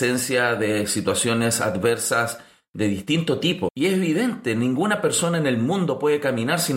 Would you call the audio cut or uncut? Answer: cut